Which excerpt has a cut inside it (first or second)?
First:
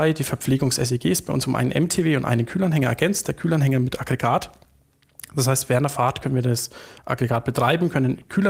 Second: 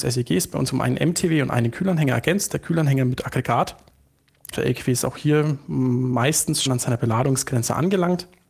second